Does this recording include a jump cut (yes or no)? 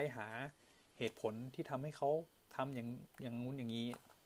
yes